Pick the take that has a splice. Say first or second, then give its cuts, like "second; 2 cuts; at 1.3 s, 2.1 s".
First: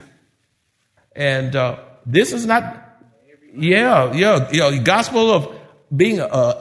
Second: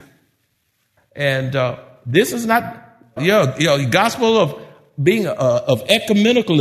second; 1 cut; at 3.2 s